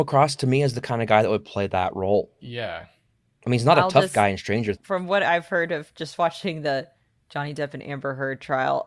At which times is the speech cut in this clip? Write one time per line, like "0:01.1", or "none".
none